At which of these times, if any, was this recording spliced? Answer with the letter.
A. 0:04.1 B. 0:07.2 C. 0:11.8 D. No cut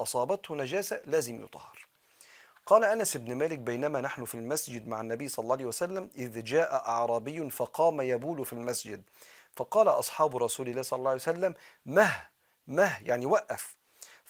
D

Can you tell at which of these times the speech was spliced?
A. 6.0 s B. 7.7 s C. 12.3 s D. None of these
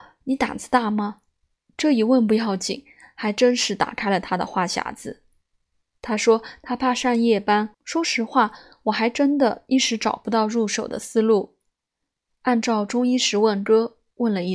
B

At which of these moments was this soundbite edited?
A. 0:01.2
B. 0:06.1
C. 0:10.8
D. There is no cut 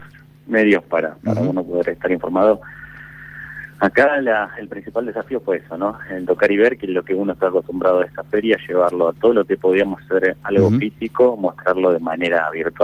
D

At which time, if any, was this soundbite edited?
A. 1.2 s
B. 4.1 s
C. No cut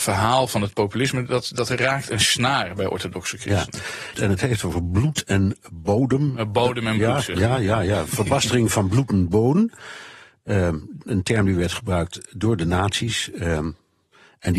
B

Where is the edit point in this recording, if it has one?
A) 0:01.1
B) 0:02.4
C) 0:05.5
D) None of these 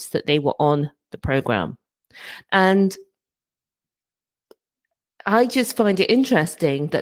B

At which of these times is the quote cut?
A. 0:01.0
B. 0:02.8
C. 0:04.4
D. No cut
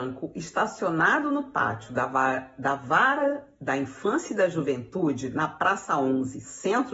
D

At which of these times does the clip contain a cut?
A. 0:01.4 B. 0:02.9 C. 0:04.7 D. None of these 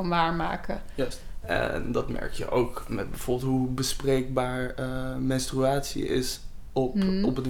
A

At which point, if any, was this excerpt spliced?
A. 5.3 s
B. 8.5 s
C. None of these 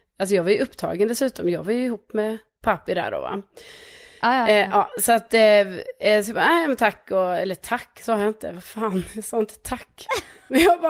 C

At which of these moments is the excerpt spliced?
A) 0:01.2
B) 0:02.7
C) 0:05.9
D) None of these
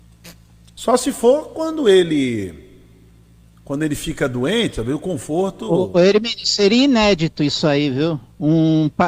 D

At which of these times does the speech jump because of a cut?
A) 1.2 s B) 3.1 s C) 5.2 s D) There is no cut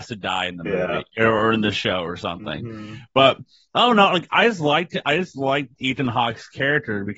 D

